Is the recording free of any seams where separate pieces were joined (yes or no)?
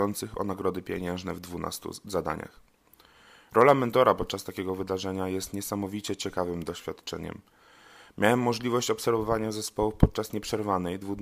yes